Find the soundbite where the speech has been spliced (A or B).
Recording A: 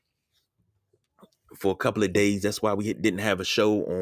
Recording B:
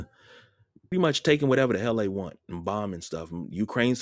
B